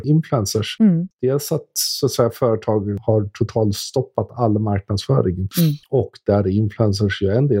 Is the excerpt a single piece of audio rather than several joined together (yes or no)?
yes